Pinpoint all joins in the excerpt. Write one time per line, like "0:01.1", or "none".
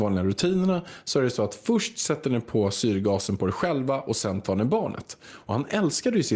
none